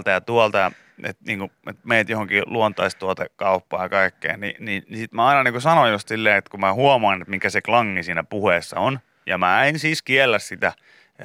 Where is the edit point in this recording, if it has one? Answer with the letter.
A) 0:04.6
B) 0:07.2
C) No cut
C